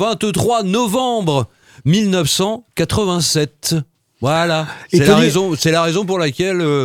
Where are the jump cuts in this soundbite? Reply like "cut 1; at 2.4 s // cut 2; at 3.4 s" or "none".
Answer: none